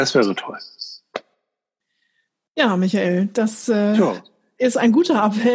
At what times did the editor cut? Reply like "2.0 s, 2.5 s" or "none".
none